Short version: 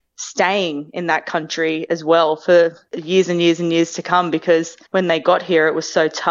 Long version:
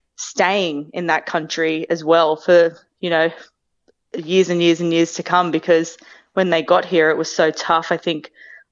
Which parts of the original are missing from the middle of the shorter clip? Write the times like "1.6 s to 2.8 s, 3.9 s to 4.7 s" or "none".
2.9 s to 4.1 s, 6.1 s to 6.3 s